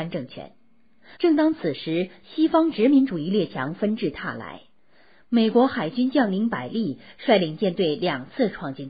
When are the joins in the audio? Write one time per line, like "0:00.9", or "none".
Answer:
0:01.1